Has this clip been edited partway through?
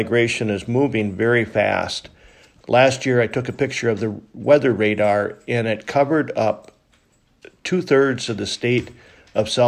yes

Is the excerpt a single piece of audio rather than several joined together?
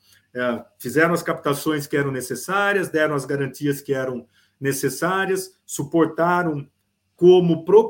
yes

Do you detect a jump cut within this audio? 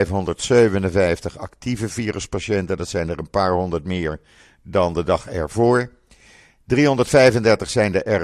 no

